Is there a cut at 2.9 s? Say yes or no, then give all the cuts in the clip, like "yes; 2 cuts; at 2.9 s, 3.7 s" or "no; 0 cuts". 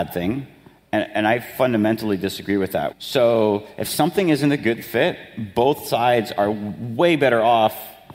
yes; 1 cut; at 2.9 s